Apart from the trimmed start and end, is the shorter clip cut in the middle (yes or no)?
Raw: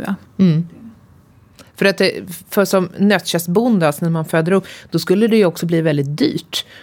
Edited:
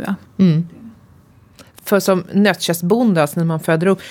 yes